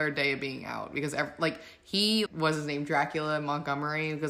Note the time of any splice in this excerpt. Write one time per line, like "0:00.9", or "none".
0:02.3